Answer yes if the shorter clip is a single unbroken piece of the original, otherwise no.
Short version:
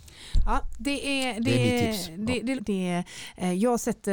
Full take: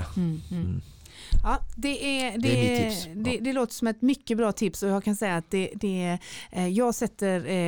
no